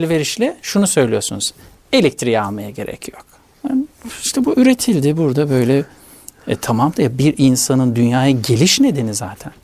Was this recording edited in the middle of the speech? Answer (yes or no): yes